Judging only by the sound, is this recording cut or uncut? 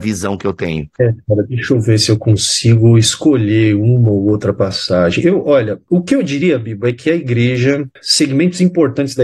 uncut